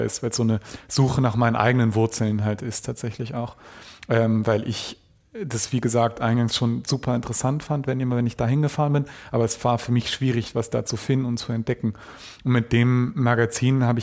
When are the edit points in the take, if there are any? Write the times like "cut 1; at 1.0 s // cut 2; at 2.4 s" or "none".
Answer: none